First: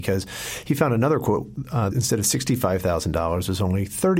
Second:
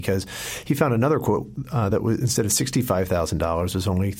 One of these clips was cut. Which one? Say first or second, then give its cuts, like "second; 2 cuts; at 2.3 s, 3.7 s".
first; 1 cut; at 1.9 s